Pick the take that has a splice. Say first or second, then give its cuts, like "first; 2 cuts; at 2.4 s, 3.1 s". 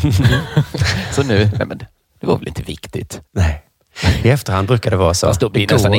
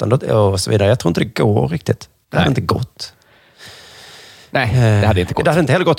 first; 1 cut; at 3.3 s